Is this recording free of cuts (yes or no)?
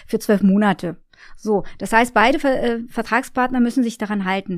yes